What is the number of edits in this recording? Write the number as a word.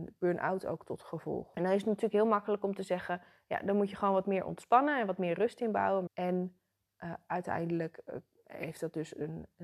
two